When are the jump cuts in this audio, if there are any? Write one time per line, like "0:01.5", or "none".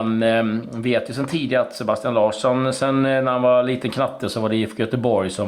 none